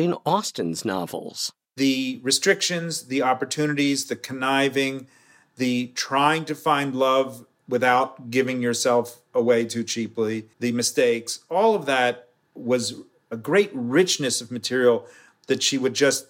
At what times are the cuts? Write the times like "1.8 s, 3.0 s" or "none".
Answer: 10.5 s

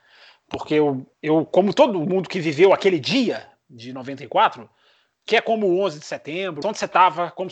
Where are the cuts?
1.1 s, 6.6 s

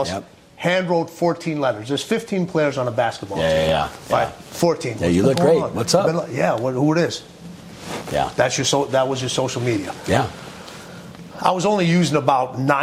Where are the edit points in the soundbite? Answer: 5.0 s

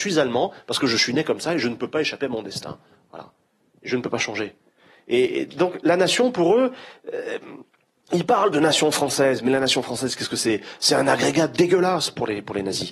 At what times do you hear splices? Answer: none

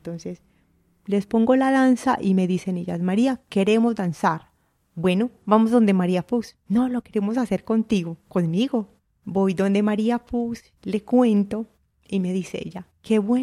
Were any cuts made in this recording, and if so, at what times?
none

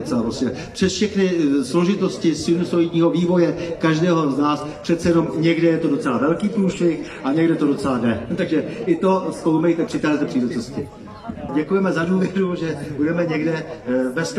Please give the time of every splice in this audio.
9.9 s, 11.5 s

